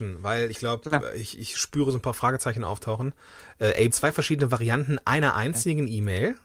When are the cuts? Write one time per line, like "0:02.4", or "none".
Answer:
0:03.9